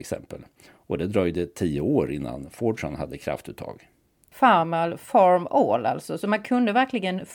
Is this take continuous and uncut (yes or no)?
yes